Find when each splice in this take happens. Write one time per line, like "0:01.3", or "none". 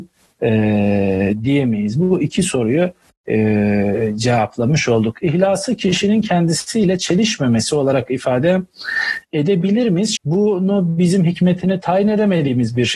0:10.2